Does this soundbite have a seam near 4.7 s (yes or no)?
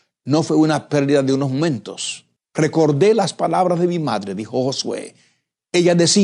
no